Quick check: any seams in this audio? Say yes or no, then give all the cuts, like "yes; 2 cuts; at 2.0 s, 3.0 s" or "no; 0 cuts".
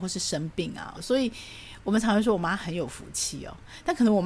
yes; 1 cut; at 1.0 s